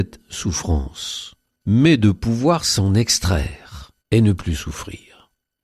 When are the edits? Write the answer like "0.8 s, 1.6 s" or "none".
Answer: 1.6 s, 4.0 s